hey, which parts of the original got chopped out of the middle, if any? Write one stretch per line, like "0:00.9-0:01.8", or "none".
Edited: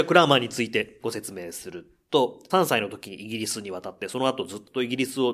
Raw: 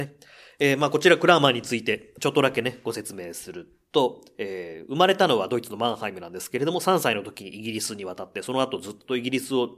0:02.1-0:02.8
0:04.3-0:06.8